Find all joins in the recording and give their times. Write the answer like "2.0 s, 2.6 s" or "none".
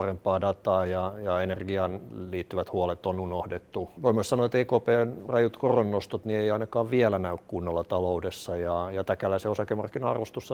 4.0 s